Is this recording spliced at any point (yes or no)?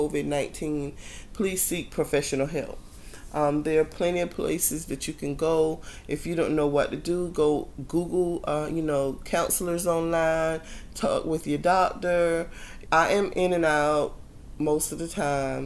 yes